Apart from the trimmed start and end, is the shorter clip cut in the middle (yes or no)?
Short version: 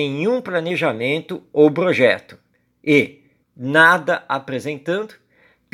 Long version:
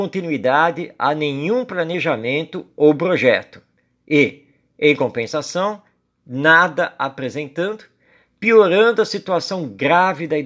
yes